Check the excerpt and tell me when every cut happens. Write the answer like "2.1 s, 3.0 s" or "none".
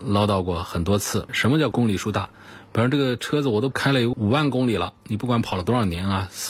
1.3 s